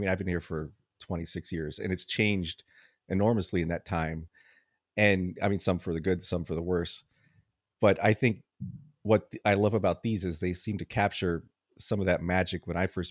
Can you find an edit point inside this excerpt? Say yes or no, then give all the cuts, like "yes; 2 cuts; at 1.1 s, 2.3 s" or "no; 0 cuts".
no; 0 cuts